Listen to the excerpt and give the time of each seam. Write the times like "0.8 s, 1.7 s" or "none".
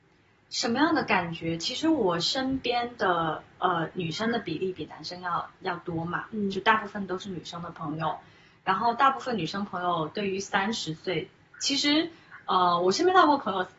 3.9 s